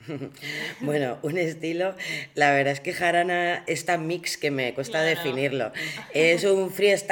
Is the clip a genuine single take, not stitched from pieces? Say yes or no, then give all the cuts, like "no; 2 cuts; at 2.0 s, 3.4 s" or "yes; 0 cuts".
yes; 0 cuts